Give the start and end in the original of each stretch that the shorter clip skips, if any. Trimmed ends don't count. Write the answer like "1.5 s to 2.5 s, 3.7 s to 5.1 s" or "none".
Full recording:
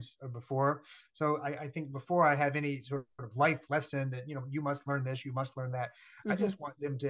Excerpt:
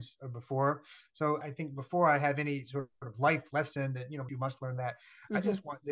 1.4 s to 1.6 s, 4.5 s to 5.2 s